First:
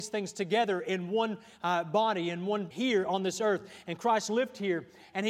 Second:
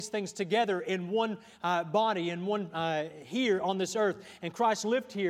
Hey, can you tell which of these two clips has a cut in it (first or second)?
first